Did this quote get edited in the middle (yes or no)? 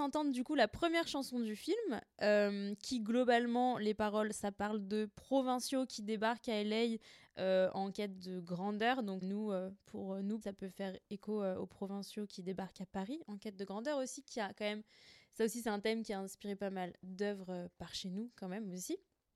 yes